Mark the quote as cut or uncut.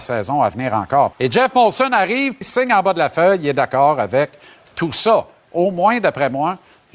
cut